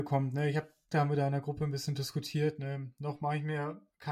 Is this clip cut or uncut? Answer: cut